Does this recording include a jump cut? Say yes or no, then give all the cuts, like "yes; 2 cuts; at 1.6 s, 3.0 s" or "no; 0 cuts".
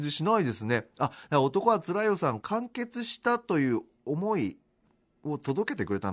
yes; 1 cut; at 2.4 s